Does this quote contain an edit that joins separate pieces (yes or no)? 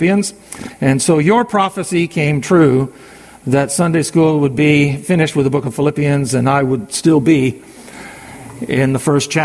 no